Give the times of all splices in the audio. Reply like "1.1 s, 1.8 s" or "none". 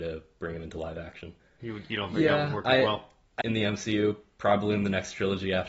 1.6 s, 3.4 s

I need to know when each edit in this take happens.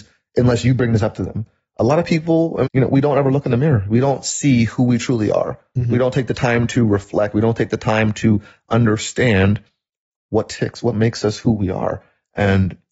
2.6 s

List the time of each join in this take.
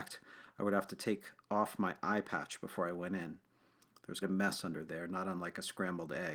4.2 s

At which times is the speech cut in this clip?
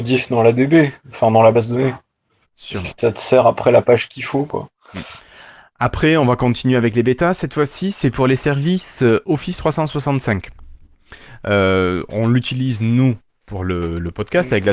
2.4 s

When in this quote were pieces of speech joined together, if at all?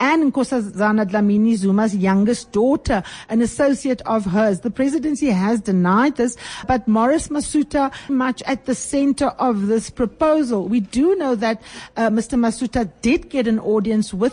6.6 s, 8.1 s

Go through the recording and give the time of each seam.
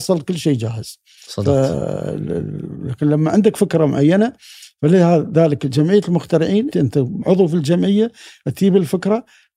6.7 s

